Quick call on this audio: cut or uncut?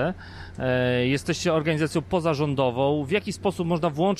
uncut